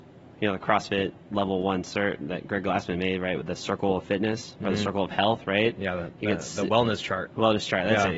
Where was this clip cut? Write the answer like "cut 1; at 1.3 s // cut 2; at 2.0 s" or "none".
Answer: none

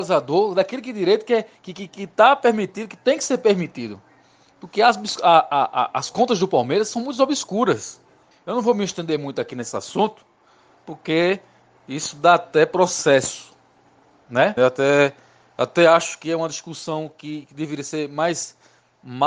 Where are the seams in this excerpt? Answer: cut 1; at 8.3 s // cut 2; at 14.6 s

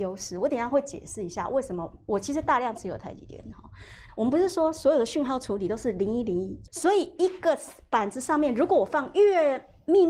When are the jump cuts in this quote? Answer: cut 1; at 4.1 s // cut 2; at 6.7 s

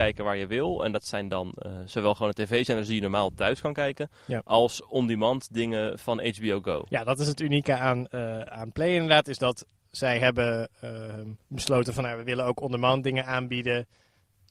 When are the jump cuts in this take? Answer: cut 1; at 11.4 s

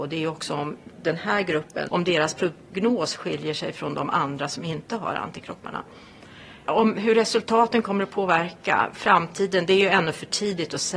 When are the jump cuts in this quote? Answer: cut 1; at 1.9 s // cut 2; at 6.6 s

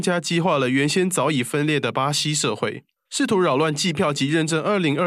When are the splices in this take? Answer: cut 1; at 3.1 s

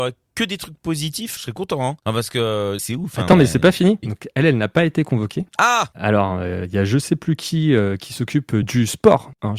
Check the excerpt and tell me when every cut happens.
cut 1; at 1.4 s // cut 2; at 4.0 s // cut 3; at 5.5 s

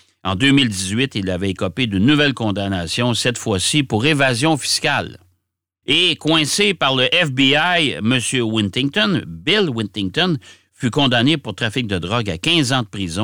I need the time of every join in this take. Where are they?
cut 1; at 5.8 s

